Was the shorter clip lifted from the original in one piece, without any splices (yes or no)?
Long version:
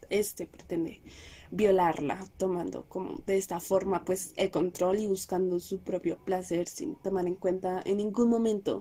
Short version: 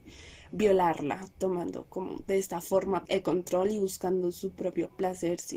no